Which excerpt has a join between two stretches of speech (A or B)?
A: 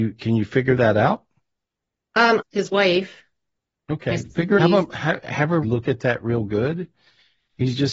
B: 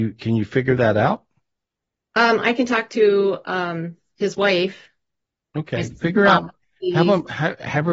A